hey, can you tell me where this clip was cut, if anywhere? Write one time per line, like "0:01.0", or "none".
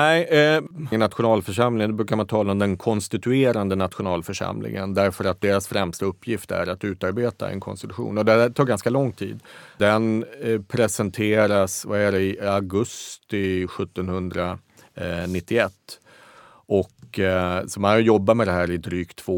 0:00.9

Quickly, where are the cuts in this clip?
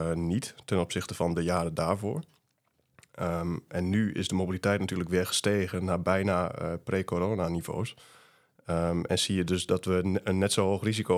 none

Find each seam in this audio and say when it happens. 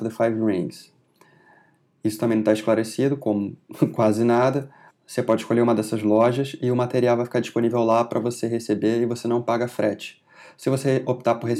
0:04.9

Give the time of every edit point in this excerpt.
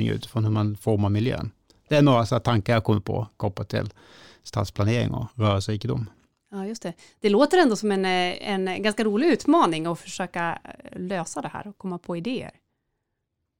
none

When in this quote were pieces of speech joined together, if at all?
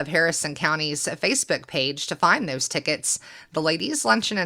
none

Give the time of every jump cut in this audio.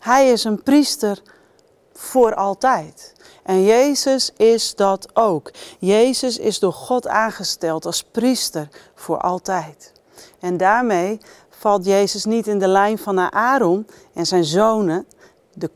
none

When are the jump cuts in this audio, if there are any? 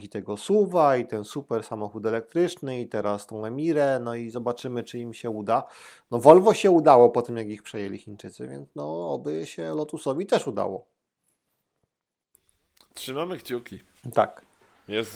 none

